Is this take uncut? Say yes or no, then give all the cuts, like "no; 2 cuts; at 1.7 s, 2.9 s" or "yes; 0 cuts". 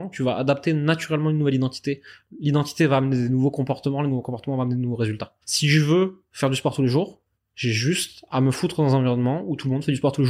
no; 1 cut; at 5.4 s